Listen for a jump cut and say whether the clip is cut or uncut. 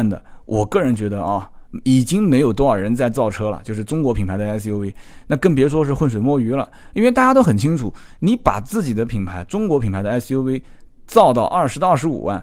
uncut